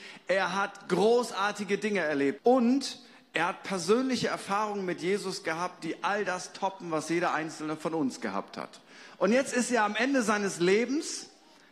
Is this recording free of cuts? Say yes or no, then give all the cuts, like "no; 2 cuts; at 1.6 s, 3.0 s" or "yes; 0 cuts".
no; 1 cut; at 2.4 s